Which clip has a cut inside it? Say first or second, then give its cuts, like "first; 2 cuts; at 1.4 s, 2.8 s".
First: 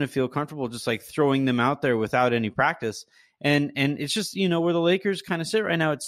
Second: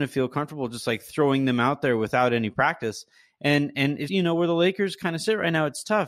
second; 1 cut; at 4.1 s